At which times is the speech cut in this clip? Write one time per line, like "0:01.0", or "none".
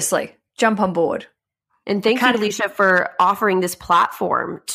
none

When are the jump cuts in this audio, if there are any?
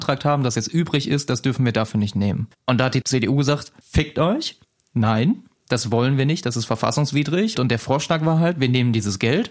0:02.5
0:07.5

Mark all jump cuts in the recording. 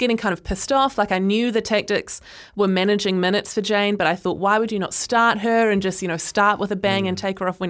none

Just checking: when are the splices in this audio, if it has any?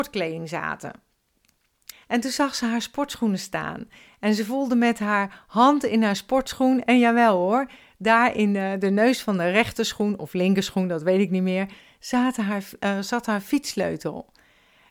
0:01.9

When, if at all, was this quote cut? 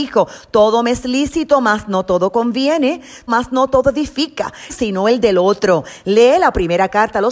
0:03.3
0:04.7

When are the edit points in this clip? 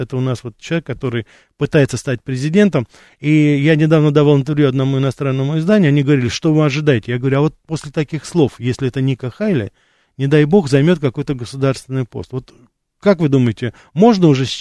none

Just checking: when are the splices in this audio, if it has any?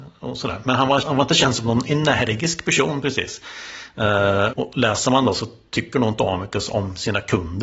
0:01.0
0:04.5

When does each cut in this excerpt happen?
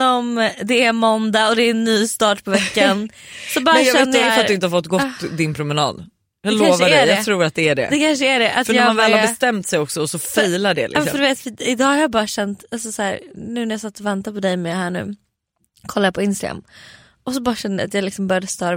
0:04.2

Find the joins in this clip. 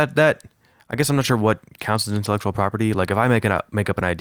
none

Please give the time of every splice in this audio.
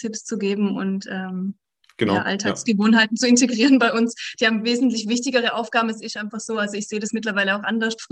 none

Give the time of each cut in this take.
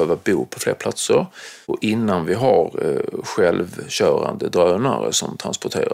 0:01.6

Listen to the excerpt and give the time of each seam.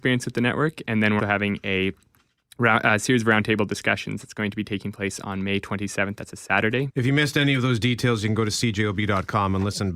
0:01.2
0:06.9

